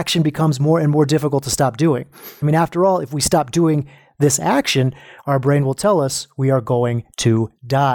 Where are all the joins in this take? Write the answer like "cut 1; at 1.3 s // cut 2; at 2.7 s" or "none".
none